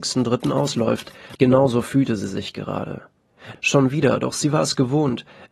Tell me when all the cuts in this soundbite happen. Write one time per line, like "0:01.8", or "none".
0:01.4
0:03.5